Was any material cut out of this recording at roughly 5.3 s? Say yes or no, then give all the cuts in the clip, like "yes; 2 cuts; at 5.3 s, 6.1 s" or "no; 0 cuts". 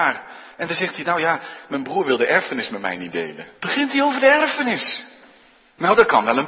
no; 1 cut; at 3.5 s